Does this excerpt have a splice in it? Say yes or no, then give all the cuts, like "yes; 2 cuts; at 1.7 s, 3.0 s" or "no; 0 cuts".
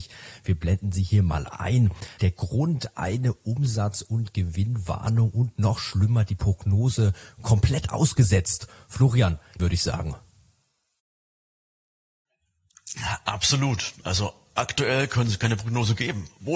yes; 2 cuts; at 2.2 s, 9.6 s